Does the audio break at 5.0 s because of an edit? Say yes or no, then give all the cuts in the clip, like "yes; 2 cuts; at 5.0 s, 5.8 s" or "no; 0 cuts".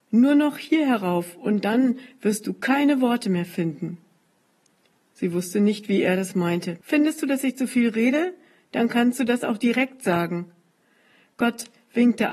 no; 1 cut; at 6.8 s